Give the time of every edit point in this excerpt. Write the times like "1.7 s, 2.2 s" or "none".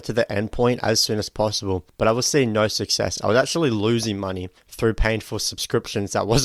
none